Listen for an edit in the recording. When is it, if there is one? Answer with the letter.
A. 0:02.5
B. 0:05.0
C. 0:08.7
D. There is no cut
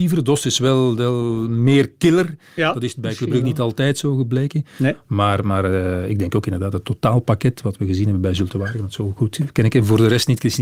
D